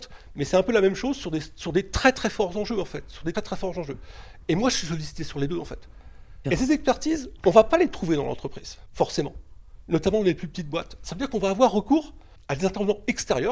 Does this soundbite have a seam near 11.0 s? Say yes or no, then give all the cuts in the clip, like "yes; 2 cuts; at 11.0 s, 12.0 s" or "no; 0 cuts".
no; 2 cuts; at 3.3 s, 6.4 s